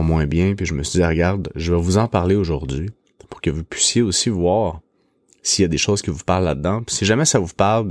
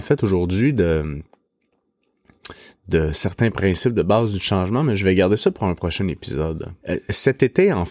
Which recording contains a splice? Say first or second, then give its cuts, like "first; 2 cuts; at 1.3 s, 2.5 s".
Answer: second; 1 cut; at 6.8 s